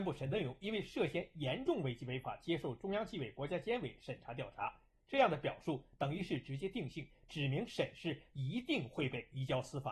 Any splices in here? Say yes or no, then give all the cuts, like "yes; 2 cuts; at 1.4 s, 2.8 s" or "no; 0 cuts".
no; 0 cuts